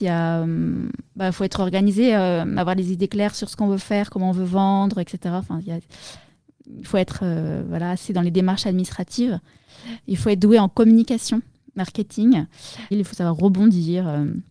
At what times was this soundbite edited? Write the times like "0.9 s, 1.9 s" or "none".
12.9 s

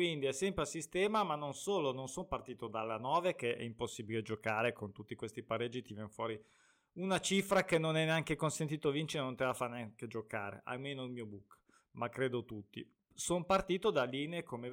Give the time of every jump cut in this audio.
12.9 s

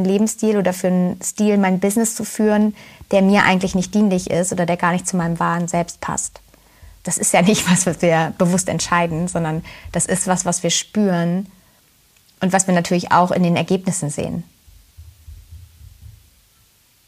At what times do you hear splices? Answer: none

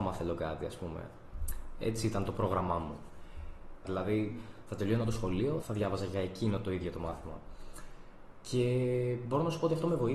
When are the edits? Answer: 3.8 s, 5.6 s

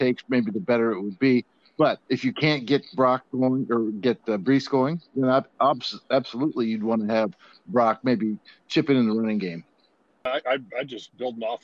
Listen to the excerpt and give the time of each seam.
2.0 s

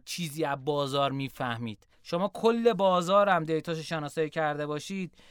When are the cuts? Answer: 1.9 s

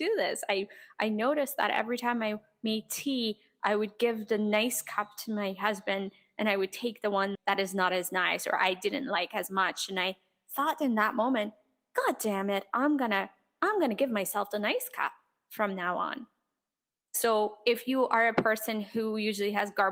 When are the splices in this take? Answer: 7.4 s, 17.0 s

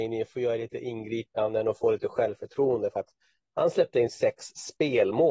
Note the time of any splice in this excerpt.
none

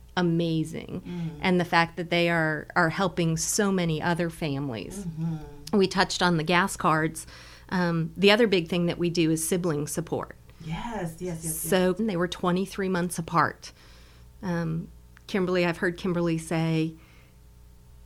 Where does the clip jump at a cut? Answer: 12.0 s

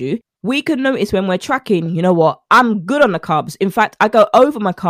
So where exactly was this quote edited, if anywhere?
none

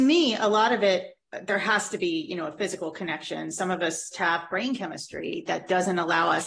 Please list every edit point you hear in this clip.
1.3 s, 4.1 s

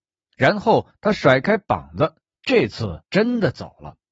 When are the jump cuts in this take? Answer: 3.1 s

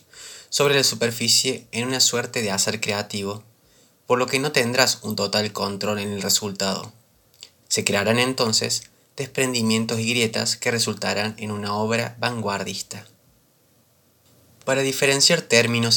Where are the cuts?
7.6 s

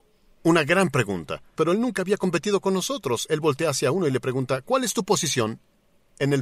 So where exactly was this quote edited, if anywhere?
1.6 s

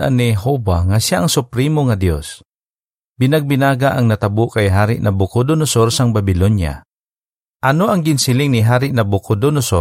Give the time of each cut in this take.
7.5 s

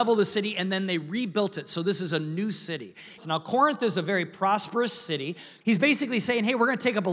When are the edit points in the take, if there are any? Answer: 3.2 s, 5.6 s

